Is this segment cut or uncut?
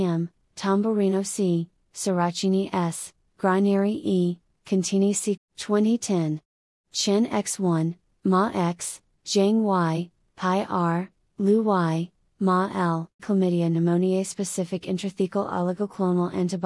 cut